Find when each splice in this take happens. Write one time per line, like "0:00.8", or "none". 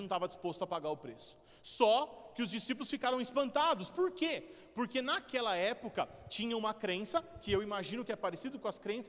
none